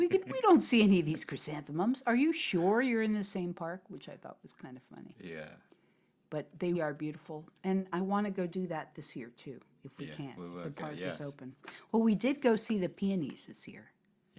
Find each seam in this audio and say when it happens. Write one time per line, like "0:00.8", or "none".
0:06.7